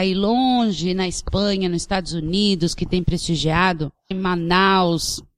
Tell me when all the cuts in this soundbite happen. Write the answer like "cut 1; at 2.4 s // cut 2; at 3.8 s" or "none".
cut 1; at 4.1 s